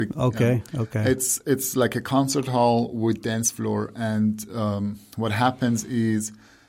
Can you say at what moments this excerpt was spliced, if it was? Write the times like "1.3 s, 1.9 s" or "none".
none